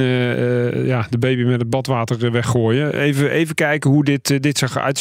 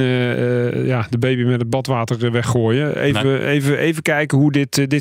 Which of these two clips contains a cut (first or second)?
first